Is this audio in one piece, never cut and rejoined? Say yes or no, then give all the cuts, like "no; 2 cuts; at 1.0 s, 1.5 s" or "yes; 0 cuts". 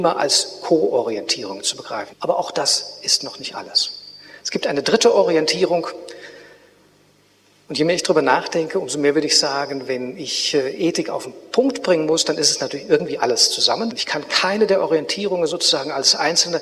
no; 2 cuts; at 2.1 s, 13.9 s